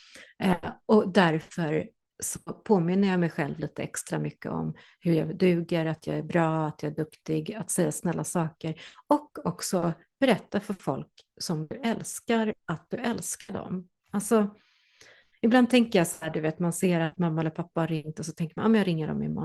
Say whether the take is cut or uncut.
uncut